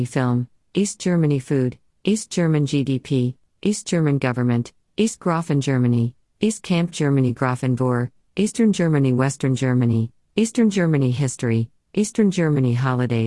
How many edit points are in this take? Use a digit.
0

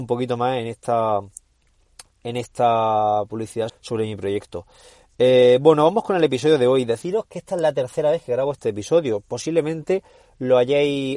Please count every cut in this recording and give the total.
1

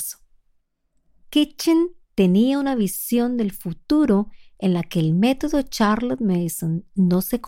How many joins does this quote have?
1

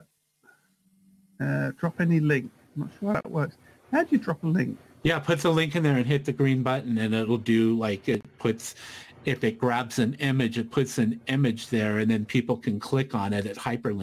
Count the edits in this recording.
0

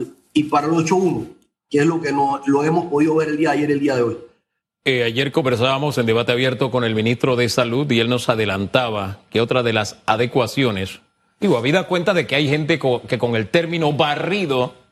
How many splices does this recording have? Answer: 0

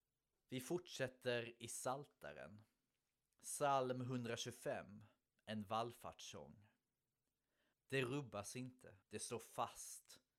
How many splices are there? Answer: 2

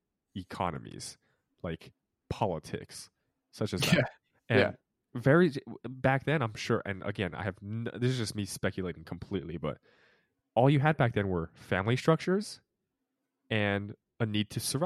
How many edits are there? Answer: 0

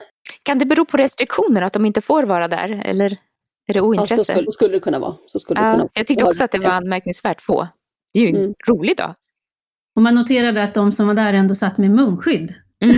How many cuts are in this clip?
1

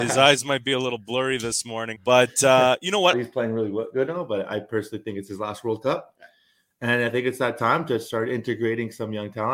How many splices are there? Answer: 2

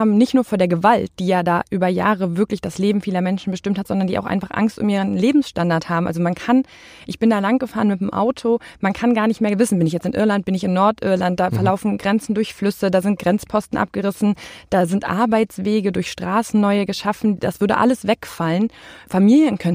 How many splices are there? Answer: 0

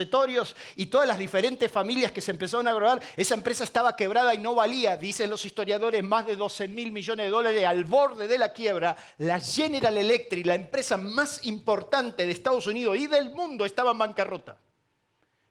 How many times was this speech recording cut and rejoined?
0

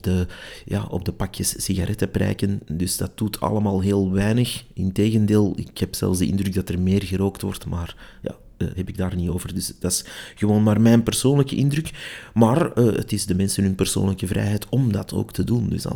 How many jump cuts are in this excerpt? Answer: 1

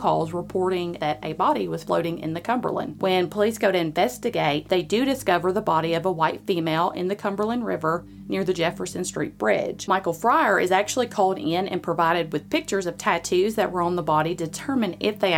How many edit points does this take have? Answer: 0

